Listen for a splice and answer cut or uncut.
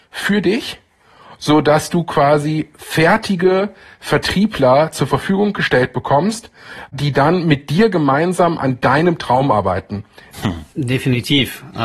cut